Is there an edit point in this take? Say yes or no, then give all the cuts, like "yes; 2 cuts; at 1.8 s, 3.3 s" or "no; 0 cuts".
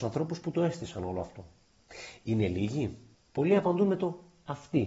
yes; 1 cut; at 3.1 s